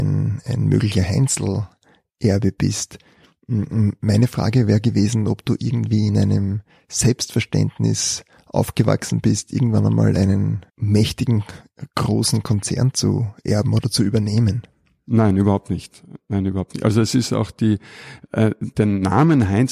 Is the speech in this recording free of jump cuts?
no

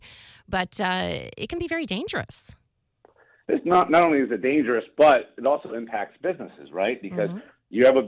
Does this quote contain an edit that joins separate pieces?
no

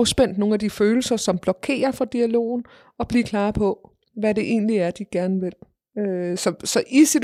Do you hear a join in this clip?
no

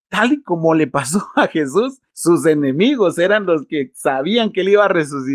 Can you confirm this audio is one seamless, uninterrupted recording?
yes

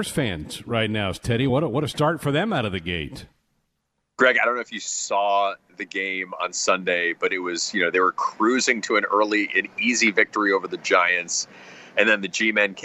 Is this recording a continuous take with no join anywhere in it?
yes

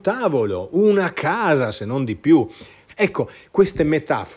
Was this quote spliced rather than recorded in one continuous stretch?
yes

